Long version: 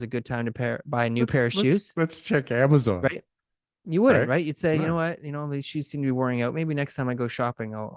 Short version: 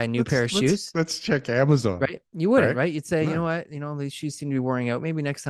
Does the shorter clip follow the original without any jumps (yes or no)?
no